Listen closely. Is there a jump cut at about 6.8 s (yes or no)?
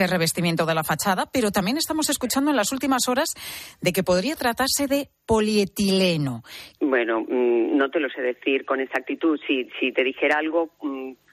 yes